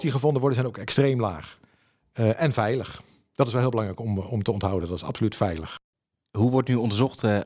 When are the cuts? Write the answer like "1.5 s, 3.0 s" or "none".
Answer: none